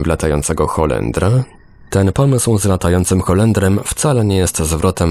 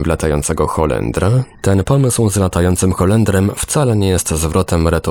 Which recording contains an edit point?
second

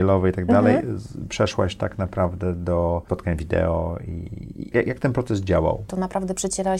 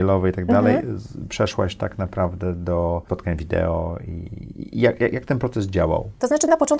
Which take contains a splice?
first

